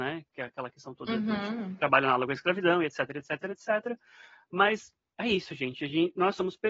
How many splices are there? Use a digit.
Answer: 0